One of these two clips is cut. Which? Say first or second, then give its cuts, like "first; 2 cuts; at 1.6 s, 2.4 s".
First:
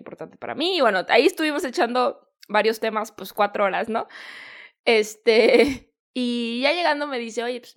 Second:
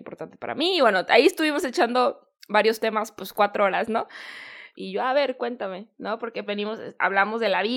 second; 2 cuts; at 4.7 s, 6.5 s